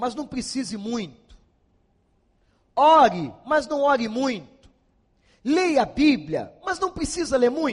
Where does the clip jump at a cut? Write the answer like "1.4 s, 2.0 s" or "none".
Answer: none